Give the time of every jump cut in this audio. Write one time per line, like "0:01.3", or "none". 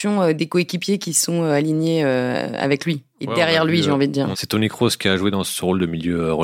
0:04.3